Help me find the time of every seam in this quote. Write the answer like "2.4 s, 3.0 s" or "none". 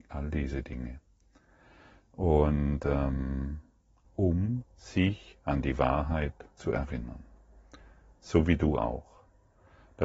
4.0 s